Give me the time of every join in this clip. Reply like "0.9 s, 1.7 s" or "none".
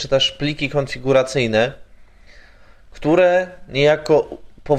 none